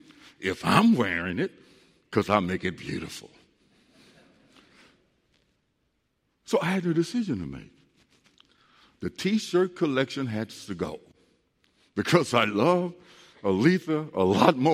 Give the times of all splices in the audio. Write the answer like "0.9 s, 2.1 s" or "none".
none